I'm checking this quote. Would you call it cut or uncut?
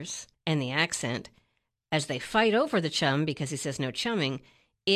uncut